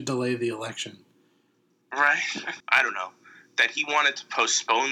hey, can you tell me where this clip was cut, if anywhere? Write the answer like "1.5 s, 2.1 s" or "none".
2.6 s